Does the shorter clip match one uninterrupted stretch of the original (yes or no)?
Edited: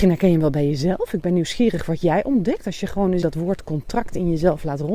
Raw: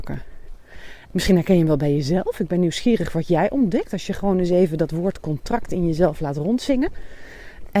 no